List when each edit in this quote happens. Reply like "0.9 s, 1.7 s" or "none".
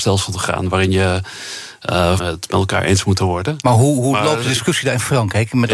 2.2 s